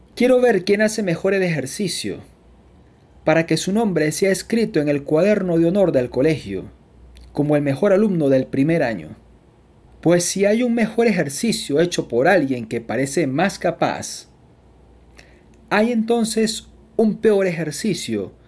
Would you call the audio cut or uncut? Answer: cut